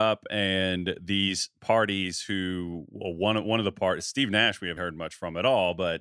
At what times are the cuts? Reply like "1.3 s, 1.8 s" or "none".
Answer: 4.8 s